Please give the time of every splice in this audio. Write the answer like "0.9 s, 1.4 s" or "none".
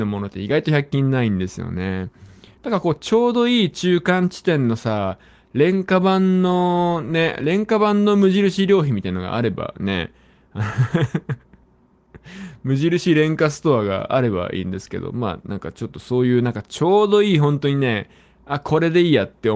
2.6 s